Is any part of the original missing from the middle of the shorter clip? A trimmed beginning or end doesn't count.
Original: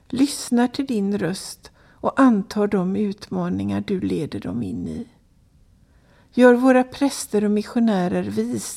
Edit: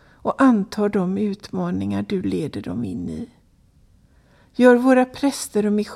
no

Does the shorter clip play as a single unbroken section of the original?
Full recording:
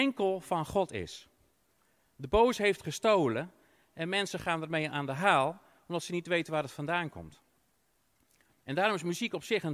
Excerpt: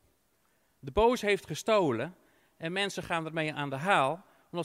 yes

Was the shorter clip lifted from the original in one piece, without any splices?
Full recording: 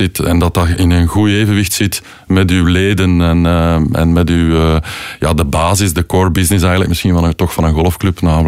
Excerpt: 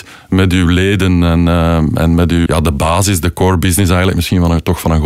no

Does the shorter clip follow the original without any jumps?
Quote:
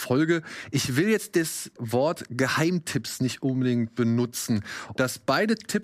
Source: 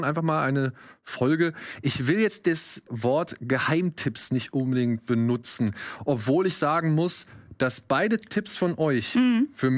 no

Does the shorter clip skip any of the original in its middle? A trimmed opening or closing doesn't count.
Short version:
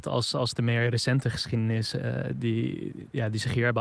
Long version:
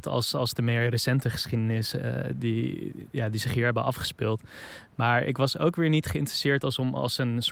no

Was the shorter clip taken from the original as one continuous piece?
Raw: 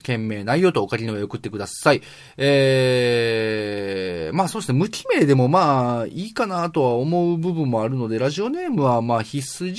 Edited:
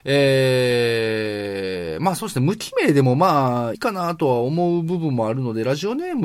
no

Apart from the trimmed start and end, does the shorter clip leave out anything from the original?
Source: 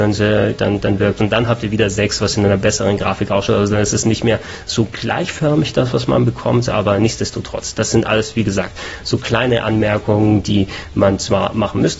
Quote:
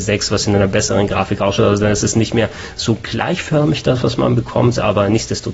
no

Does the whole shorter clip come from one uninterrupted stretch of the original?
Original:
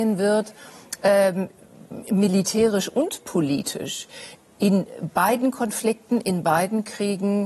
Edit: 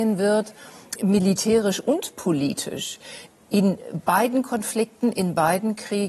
no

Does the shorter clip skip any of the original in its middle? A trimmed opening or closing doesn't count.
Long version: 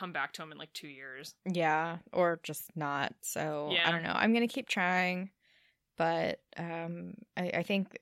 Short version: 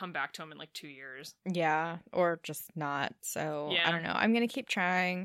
no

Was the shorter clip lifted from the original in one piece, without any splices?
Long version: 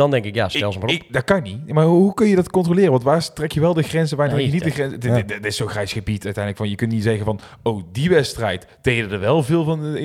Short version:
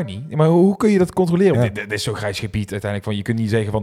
no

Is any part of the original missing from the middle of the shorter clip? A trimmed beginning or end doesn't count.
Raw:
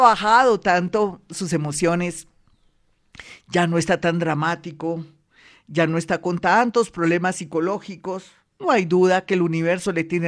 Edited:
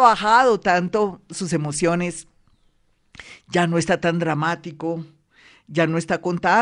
no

